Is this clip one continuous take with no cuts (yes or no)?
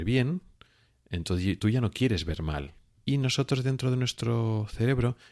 no